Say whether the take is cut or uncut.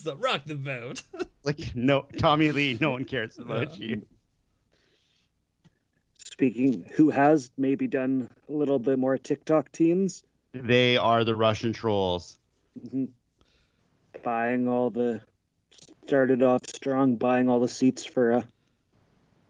uncut